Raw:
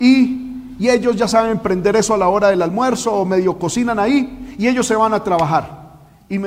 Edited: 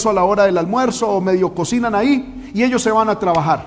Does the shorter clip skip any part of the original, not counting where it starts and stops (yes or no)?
no